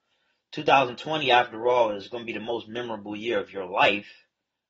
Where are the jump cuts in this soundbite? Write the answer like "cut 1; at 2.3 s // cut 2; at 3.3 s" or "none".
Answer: none